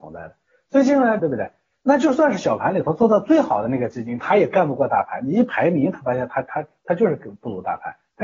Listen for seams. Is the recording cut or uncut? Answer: cut